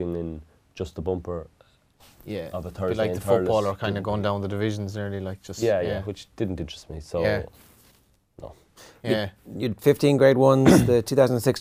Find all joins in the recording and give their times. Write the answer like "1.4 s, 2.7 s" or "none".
none